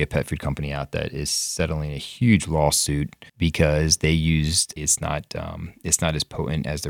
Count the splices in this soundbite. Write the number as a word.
two